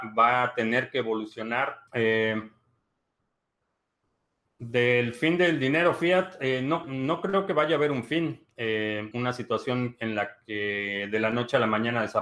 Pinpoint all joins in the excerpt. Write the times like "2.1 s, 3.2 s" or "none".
1.9 s, 6.8 s, 9.1 s